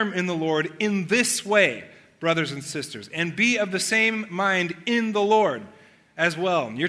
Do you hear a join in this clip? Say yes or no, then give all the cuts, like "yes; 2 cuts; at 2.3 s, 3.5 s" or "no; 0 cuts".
no; 0 cuts